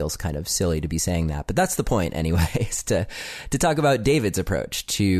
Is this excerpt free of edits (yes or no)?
yes